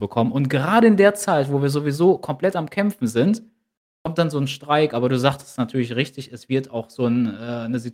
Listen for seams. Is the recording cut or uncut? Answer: uncut